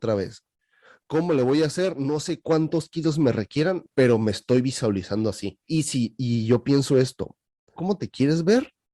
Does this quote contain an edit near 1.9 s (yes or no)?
no